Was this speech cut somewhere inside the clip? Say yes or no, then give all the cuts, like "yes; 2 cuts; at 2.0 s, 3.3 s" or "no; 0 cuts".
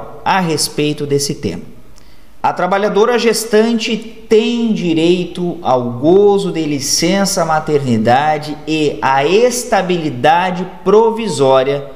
yes; 1 cut; at 2.4 s